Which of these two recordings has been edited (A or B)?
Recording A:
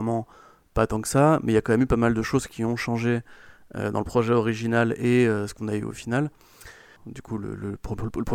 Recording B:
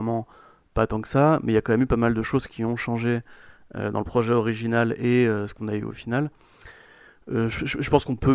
A